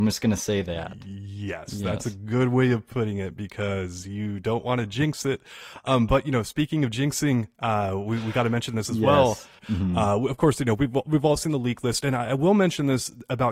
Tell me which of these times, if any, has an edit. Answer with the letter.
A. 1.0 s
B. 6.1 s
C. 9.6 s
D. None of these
C